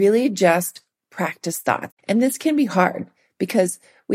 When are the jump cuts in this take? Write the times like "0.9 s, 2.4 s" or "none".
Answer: 1.9 s